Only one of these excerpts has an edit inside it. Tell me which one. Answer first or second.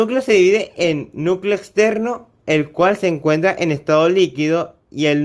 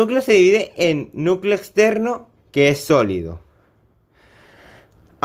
second